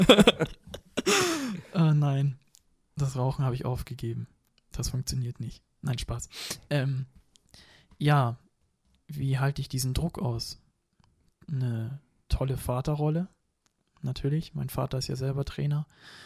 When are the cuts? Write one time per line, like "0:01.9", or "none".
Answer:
none